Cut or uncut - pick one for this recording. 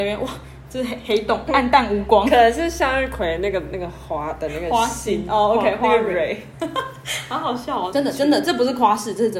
cut